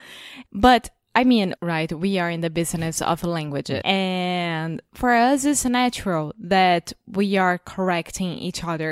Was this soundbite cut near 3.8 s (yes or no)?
yes